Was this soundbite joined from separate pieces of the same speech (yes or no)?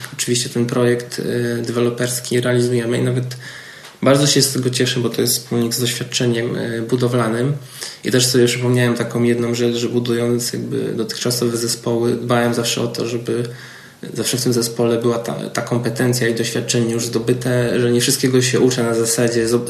no